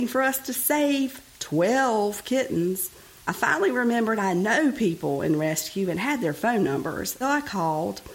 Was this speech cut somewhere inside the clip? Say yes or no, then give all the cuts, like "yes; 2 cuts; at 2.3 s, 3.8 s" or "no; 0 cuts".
yes; 2 cuts; at 3.2 s, 7.2 s